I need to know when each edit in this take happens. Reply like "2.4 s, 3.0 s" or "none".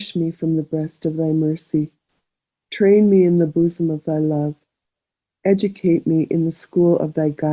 none

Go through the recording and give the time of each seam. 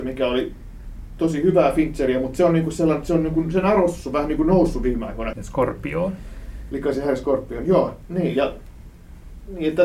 5.3 s

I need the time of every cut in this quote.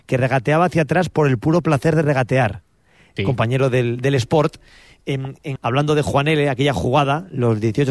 3.2 s, 5.6 s

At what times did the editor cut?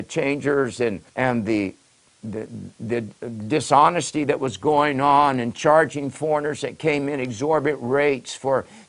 1.1 s

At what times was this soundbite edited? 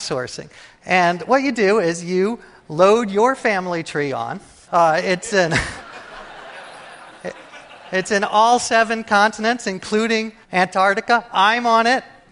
4.6 s, 10.4 s

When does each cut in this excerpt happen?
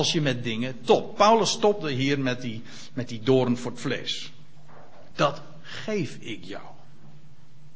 5.1 s

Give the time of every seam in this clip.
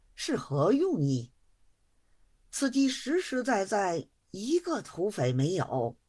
none

